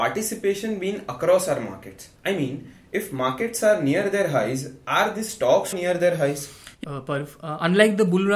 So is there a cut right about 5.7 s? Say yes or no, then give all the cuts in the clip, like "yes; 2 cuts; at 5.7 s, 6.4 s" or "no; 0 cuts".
yes; 2 cuts; at 5.7 s, 6.8 s